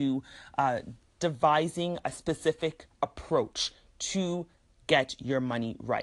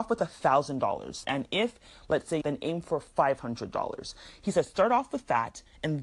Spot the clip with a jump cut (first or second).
second